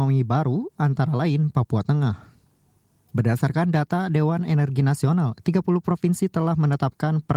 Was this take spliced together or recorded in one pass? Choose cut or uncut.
cut